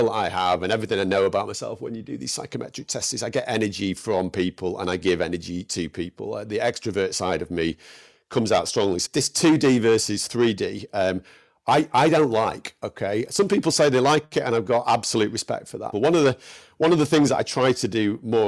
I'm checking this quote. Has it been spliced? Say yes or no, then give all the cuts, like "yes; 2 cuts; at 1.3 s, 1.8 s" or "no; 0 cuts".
yes; 2 cuts; at 9.0 s, 15.9 s